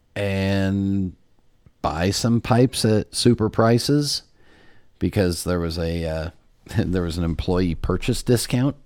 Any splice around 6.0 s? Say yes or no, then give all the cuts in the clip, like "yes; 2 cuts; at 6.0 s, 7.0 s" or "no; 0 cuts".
no; 0 cuts